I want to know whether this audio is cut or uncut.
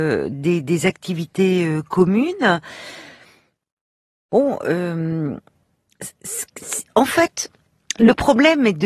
uncut